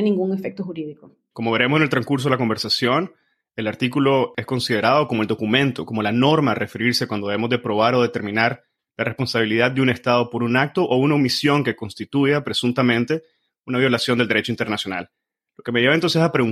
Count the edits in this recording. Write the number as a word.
zero